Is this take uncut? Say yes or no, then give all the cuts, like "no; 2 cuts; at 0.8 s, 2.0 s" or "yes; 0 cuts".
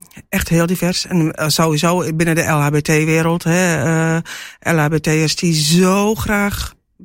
yes; 0 cuts